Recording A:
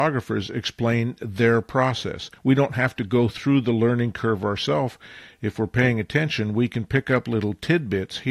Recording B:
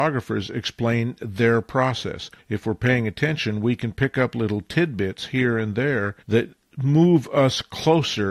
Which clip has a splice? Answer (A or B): B